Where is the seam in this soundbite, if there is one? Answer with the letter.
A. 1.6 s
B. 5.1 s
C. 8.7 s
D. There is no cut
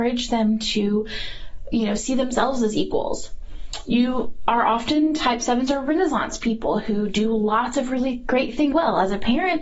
C